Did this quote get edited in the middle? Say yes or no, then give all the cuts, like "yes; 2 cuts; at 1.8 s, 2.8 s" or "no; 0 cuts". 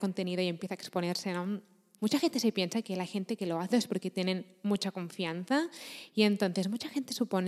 yes; 3 cuts; at 2.0 s, 3.7 s, 6.1 s